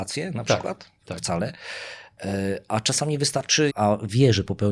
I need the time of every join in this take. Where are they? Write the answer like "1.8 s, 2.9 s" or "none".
1.2 s, 3.7 s